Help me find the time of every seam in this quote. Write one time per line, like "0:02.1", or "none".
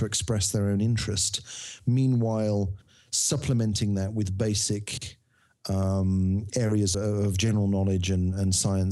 0:06.9